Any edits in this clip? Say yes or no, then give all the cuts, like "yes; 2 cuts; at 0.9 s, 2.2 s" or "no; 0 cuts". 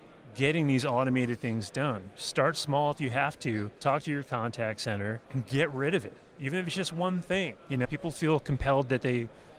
yes; 3 cuts; at 3.8 s, 5.2 s, 7.8 s